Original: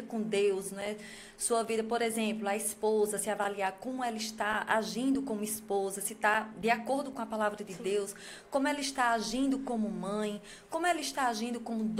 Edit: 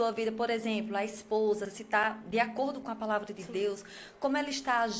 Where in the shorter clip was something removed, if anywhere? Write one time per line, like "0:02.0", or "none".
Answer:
0:01.7

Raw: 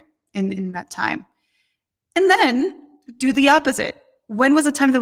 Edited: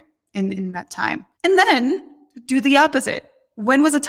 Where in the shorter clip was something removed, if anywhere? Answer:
0:01.3

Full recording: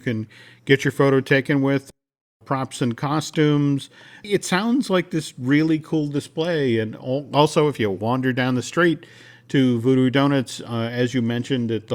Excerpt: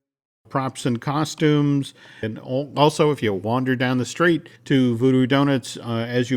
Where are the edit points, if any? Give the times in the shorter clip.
0:02.2
0:04.6

